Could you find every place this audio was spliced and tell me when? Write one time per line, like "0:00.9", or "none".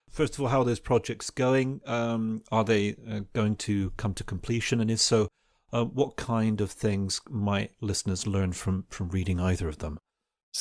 none